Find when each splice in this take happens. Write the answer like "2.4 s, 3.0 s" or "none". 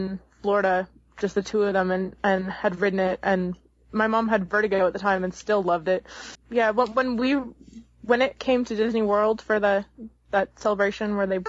6.3 s